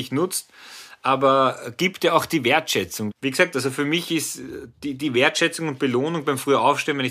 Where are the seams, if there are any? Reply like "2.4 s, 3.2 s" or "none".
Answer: 3.1 s

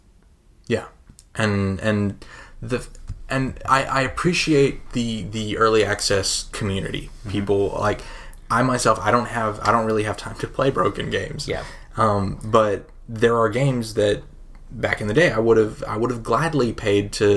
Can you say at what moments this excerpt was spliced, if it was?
none

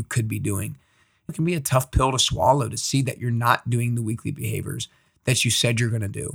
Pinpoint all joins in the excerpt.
1.3 s

